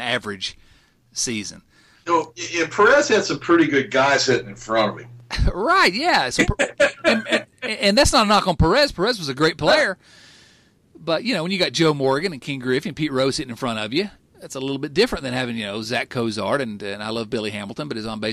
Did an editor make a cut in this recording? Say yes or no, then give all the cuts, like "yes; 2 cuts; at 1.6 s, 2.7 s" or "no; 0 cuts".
no; 0 cuts